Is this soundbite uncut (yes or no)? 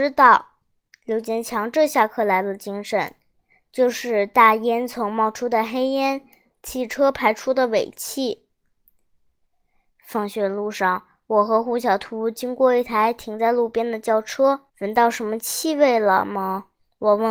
no